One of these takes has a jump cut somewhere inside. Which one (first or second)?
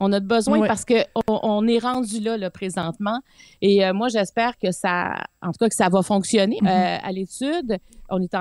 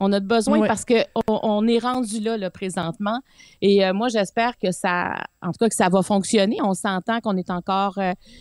first